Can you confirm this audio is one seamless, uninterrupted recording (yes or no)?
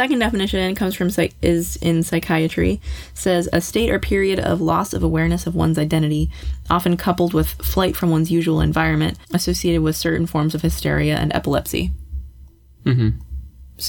no